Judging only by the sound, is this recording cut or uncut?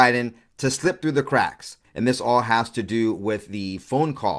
cut